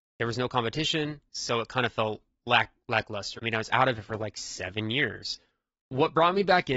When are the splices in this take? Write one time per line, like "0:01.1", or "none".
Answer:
0:03.4